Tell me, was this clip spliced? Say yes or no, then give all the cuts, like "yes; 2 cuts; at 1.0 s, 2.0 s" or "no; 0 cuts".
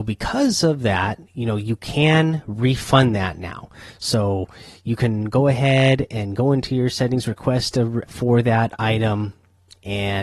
yes; 1 cut; at 8.1 s